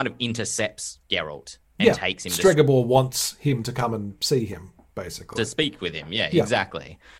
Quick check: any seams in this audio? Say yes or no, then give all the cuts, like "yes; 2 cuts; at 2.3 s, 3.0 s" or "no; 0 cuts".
no; 0 cuts